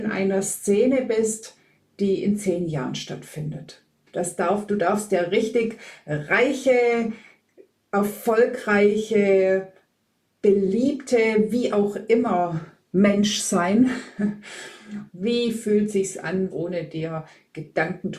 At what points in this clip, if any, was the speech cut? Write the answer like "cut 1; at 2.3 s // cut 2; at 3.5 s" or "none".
cut 1; at 4.1 s // cut 2; at 15.1 s // cut 3; at 16.5 s